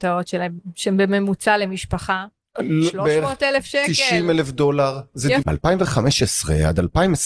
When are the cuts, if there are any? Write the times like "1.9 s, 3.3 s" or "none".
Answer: 5.4 s